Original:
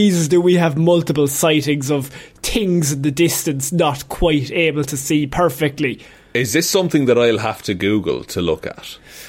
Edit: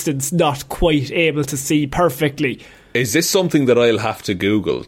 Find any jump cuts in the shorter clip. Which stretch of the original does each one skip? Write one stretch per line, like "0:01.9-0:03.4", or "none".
none